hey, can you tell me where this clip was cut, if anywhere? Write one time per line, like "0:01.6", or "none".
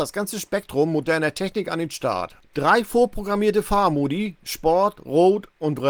none